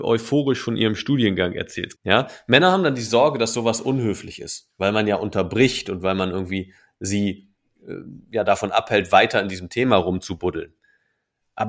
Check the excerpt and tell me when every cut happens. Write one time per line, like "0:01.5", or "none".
0:01.9